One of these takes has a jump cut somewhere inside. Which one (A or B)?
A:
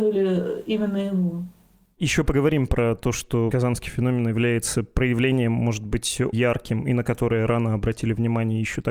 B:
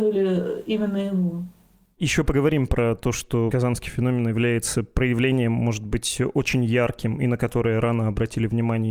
A